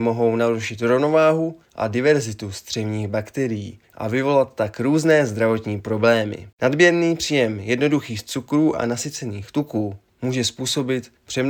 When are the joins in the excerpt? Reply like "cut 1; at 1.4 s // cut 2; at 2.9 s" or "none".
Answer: cut 1; at 6.5 s